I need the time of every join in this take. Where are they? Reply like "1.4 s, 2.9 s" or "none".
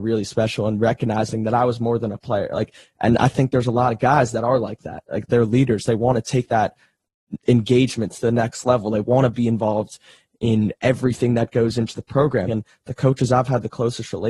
5.3 s, 12.4 s